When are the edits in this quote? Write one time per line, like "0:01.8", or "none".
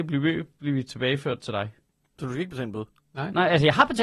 none